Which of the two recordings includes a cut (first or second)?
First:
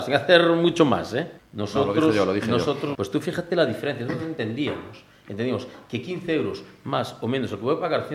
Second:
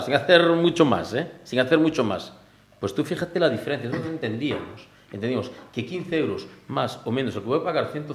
first